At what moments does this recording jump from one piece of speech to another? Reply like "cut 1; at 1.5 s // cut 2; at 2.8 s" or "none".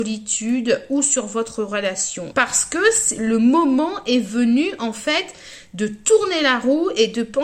cut 1; at 2.3 s